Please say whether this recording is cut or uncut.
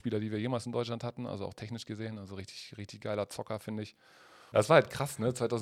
cut